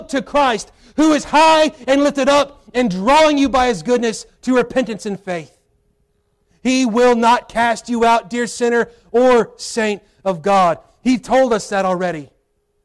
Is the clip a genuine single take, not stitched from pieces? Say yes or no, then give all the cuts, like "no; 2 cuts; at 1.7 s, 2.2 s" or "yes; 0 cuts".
yes; 0 cuts